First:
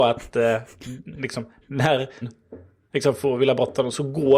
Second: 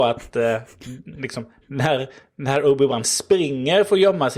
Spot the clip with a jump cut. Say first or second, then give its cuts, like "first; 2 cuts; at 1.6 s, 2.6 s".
first; 1 cut; at 2.2 s